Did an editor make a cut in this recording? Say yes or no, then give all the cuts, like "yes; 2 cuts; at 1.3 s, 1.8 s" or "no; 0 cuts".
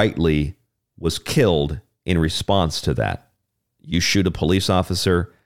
yes; 1 cut; at 3.7 s